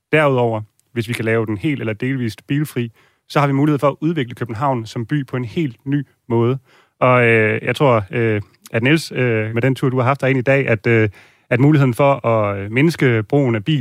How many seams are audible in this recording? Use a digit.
1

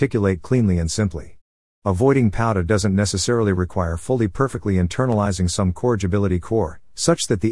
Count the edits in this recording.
1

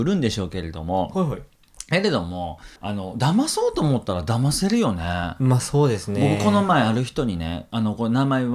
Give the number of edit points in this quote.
1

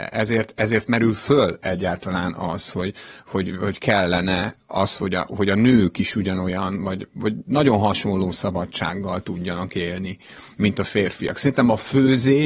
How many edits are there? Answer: 0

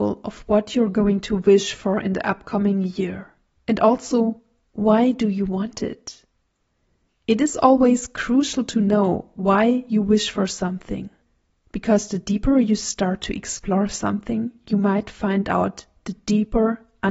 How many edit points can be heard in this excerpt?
1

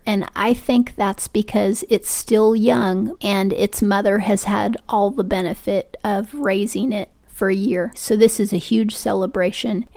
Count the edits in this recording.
2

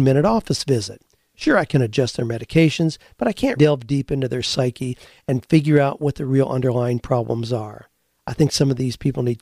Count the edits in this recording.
1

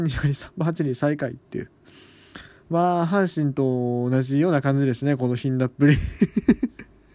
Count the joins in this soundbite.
0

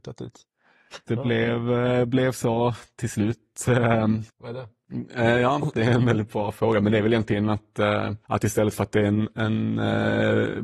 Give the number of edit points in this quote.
3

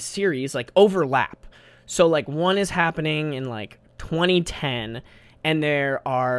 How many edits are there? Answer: 0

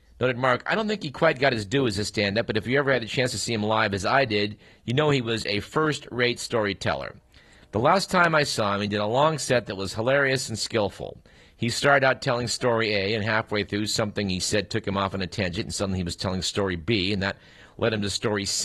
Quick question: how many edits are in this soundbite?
0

